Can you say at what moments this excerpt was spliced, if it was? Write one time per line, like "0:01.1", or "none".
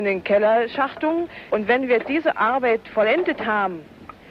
0:01.5